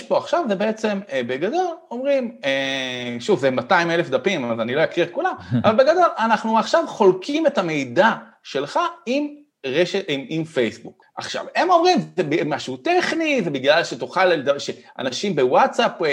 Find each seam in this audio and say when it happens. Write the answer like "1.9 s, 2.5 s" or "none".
none